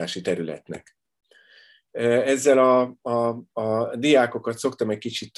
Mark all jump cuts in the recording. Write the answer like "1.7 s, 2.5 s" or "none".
1.9 s